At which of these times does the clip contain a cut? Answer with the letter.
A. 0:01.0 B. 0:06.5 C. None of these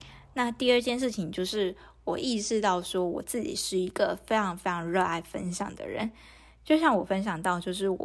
C